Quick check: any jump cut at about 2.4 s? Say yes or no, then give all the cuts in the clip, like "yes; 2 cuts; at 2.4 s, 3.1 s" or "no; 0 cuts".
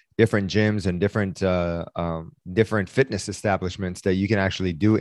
yes; 1 cut; at 2.4 s